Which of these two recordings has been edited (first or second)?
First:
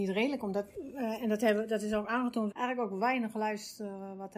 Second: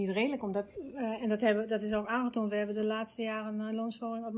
first